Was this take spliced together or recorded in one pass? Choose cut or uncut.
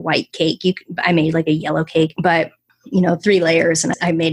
uncut